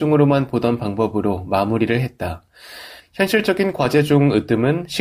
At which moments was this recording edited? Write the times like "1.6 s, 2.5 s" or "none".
3.0 s